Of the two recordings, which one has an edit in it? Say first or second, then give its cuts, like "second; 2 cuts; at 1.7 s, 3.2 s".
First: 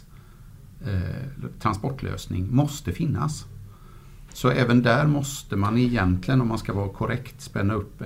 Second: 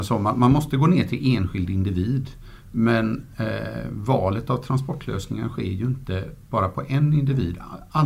first; 1 cut; at 4.3 s